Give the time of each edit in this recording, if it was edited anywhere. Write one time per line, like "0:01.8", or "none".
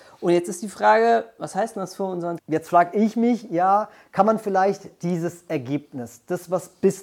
0:02.4